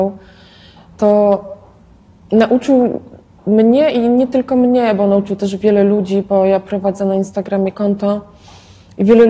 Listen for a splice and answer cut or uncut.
uncut